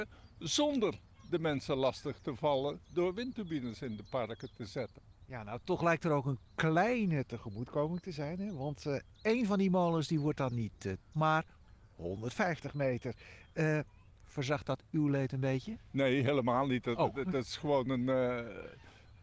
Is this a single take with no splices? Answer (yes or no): no